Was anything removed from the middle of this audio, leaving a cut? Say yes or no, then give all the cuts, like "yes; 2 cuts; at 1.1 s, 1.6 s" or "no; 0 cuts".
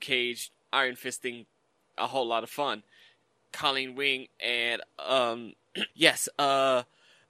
yes; 1 cut; at 5.9 s